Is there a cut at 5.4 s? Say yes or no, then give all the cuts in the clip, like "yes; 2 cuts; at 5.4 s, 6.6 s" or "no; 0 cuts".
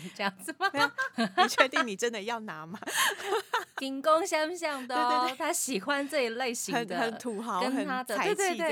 no; 1 cut; at 1.1 s